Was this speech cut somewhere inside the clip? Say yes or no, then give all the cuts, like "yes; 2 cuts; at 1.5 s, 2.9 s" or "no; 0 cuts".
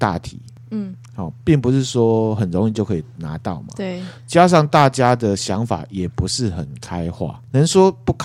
no; 0 cuts